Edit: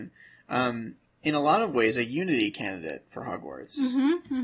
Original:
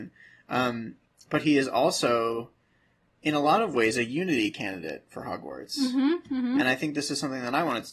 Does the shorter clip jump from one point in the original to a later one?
yes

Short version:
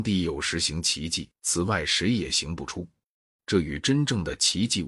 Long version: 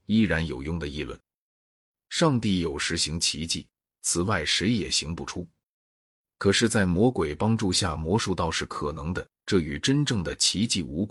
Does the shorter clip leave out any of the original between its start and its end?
yes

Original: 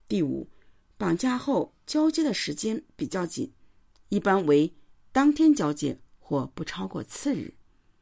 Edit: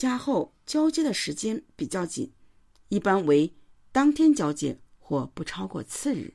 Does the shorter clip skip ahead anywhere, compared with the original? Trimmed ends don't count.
no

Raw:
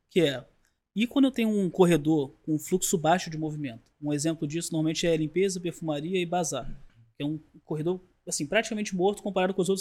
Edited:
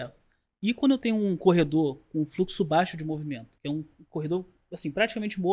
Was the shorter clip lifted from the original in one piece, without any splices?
no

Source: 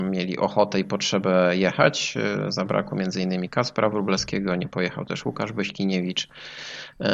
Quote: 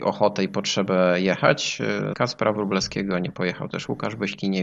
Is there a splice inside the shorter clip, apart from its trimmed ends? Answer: yes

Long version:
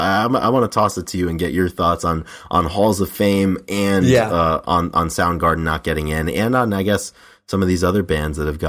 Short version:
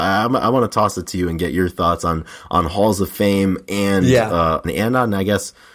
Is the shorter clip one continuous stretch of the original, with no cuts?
no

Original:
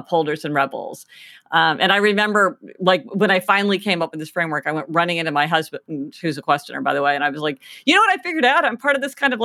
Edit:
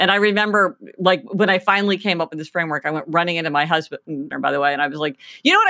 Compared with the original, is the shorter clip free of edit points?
no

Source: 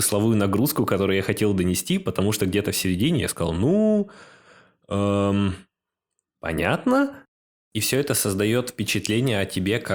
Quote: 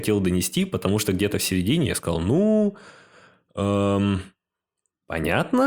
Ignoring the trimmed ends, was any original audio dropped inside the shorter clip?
no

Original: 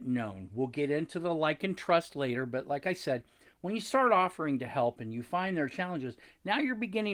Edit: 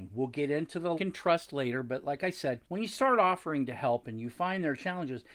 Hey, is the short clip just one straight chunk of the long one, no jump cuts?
no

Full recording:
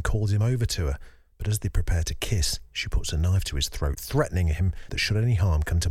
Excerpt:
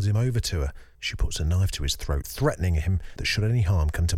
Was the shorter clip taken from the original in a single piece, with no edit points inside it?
no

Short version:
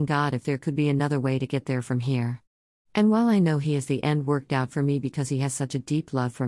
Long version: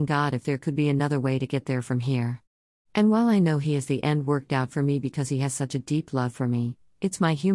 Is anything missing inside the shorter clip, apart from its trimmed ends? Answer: no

